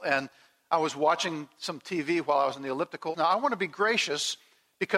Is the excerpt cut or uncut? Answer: cut